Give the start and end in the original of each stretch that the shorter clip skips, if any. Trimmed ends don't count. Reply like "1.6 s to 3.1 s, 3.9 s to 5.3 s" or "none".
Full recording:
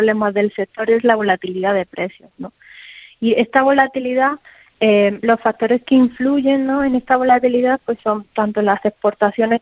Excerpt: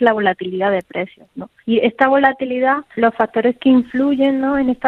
2.6 s to 3.1 s, 4.5 s to 5.2 s